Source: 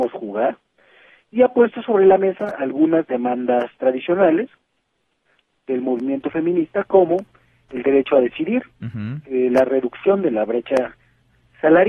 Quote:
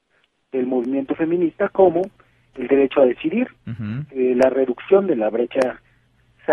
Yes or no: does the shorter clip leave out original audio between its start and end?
no